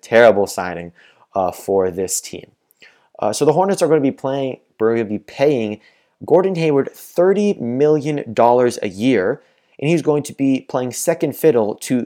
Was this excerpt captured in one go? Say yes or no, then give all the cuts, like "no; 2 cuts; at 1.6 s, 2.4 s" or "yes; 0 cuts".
yes; 0 cuts